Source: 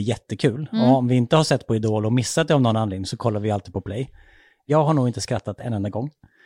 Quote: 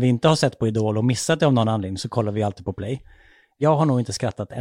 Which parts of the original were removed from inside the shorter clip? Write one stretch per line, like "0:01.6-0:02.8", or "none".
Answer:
none

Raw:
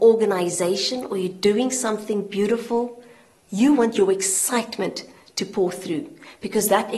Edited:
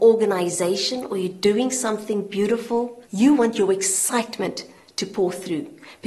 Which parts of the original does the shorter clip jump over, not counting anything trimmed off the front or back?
0:03.0-0:03.4

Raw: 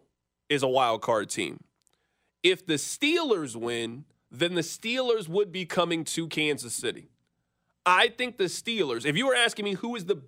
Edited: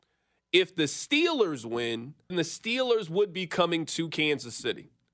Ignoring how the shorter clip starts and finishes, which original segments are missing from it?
0:04.2-0:04.5

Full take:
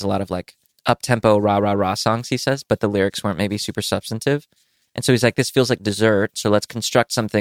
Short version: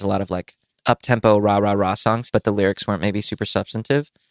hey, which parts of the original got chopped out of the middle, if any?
0:02.3-0:02.7

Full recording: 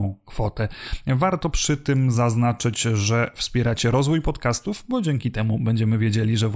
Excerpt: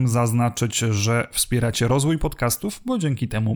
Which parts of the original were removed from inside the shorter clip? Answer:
none

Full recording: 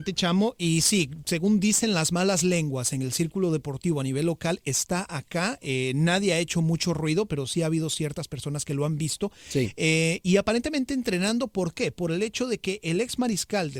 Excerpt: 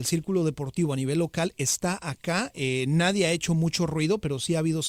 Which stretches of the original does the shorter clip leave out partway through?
none

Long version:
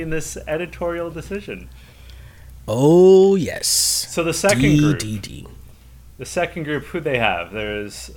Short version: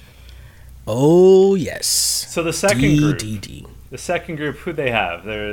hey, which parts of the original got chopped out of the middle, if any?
0:05.7-0:06.1

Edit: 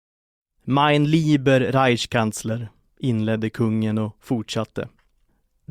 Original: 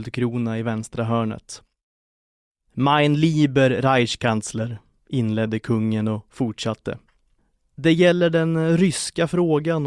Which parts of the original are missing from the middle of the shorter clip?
none

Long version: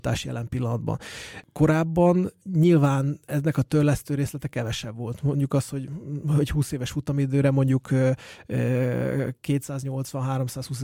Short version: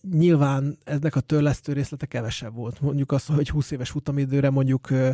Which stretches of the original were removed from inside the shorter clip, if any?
0:05.7-0:06.3

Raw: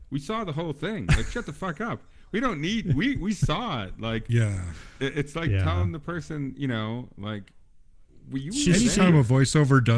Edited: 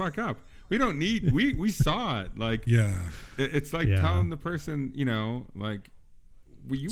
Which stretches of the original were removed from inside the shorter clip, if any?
none

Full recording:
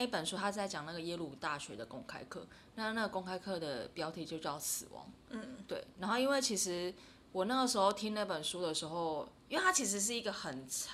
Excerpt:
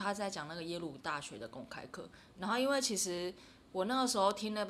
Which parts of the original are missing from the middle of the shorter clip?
0:02.7-0:05.9

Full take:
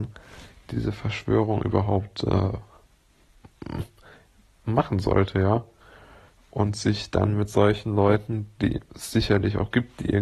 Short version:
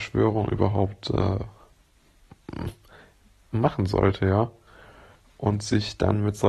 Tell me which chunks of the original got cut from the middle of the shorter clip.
none

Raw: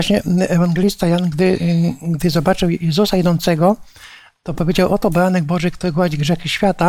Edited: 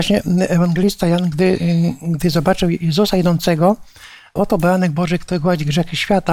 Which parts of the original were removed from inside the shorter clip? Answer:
0:04.4-0:04.9

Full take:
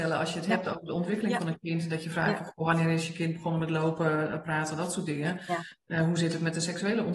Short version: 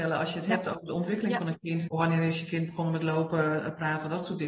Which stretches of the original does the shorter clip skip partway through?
0:01.9-0:02.5

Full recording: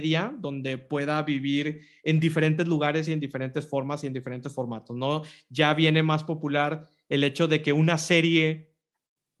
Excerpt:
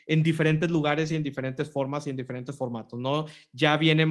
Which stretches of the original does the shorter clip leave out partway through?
none

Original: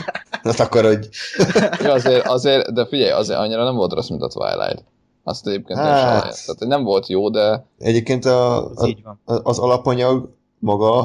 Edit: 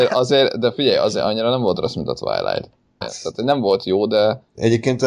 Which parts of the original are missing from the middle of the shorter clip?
0:05.1-0:06.2

